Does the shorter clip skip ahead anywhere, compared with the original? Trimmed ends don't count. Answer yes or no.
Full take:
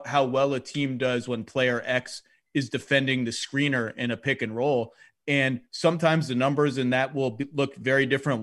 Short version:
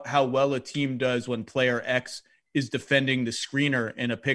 no